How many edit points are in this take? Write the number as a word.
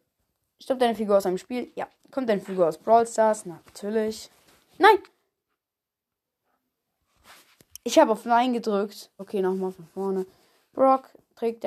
two